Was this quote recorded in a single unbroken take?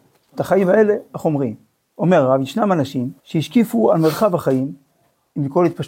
no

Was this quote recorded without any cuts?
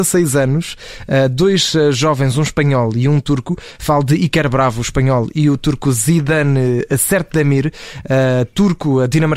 yes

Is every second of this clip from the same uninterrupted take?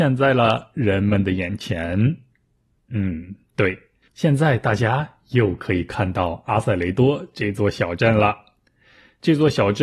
yes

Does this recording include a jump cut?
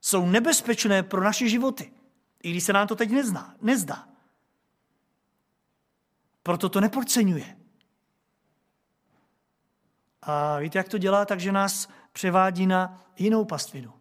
no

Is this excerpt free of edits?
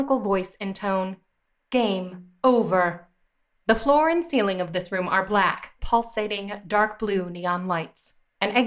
no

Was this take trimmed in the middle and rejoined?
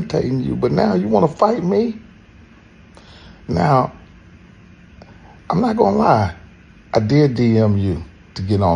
no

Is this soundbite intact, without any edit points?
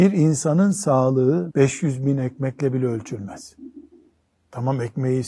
no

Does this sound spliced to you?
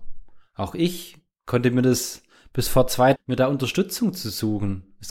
yes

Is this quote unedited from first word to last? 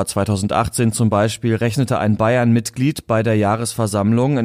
yes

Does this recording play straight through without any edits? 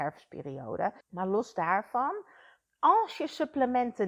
no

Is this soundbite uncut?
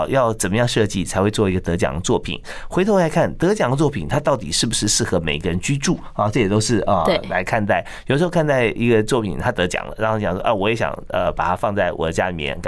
yes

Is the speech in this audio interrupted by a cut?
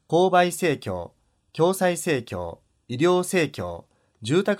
no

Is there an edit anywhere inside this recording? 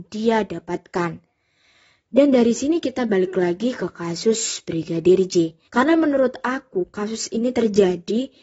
yes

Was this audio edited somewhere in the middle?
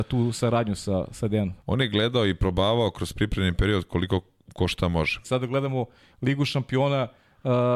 yes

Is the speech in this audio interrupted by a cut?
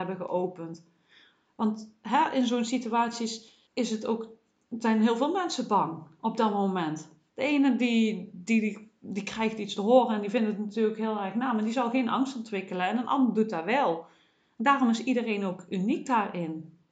yes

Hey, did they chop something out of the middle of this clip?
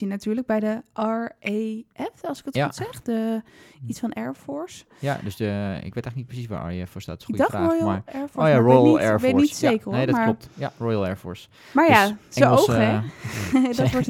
no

